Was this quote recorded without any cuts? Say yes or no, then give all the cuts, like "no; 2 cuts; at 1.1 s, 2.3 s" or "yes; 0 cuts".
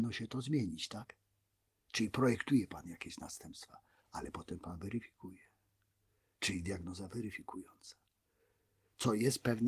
yes; 0 cuts